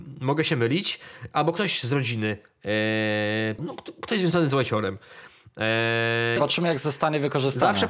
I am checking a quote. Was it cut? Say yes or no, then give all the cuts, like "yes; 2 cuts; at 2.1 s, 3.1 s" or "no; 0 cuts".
yes; 2 cuts; at 3.6 s, 6.4 s